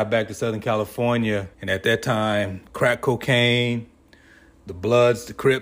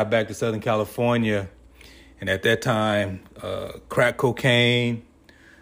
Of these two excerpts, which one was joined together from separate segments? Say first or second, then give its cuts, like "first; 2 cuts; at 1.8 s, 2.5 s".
first; 2 cuts; at 1.5 s, 2.7 s